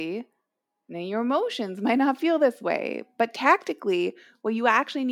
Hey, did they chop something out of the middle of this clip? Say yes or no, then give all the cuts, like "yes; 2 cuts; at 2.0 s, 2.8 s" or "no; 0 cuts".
no; 0 cuts